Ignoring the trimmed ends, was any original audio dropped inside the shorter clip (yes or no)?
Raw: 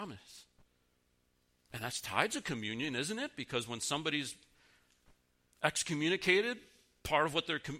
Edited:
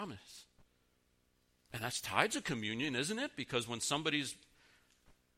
no